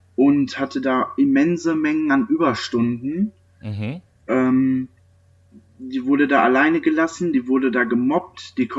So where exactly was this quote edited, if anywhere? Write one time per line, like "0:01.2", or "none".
none